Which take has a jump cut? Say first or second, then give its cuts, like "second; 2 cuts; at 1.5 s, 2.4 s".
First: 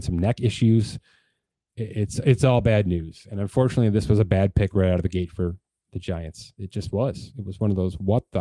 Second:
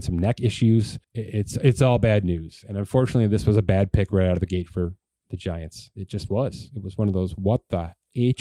second; 1 cut; at 1.0 s